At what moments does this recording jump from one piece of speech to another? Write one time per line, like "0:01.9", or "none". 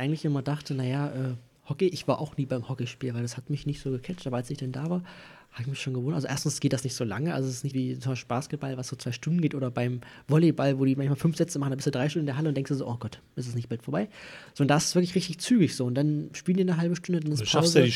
0:07.7